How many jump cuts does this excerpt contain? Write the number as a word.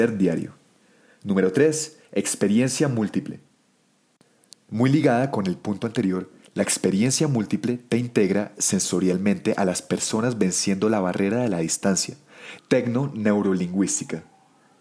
one